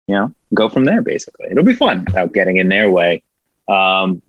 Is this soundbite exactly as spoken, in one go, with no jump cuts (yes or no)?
no